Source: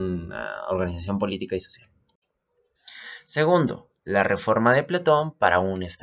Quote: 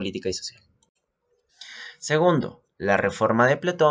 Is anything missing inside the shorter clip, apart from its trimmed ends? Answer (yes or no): no